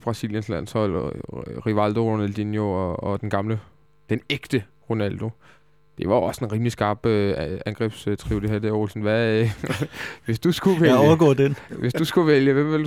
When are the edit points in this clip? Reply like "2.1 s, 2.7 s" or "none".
11.7 s